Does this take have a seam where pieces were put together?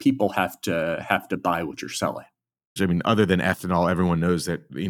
yes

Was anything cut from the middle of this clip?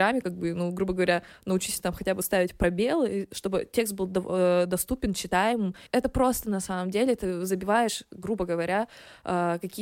no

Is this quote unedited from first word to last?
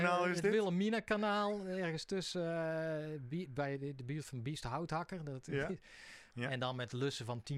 no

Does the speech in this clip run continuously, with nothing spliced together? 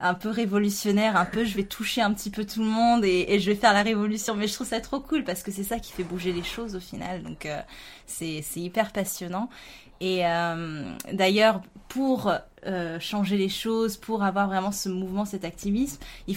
yes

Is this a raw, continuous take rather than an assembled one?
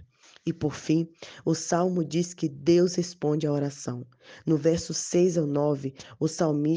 yes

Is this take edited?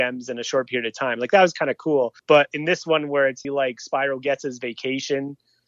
yes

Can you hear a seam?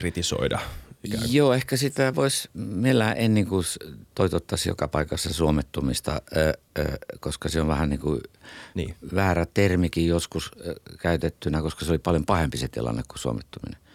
no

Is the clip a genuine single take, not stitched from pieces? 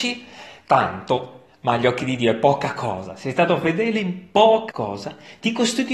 no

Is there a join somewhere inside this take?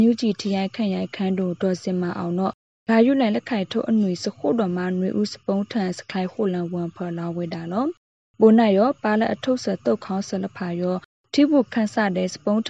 no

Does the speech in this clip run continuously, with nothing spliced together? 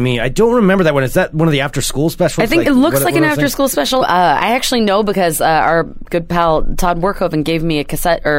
no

